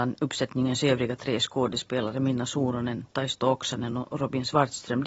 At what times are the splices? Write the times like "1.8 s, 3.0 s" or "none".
none